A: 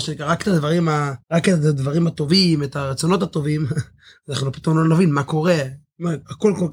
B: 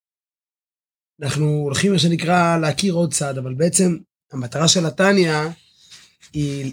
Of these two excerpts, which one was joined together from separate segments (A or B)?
A